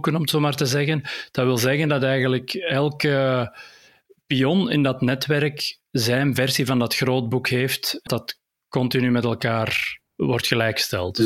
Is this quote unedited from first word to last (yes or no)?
no